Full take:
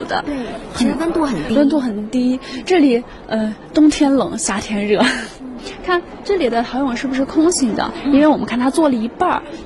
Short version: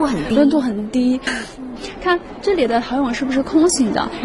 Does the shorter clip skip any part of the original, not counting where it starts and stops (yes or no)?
yes